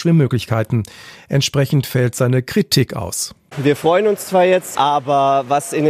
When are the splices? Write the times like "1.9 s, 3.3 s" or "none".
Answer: 4.8 s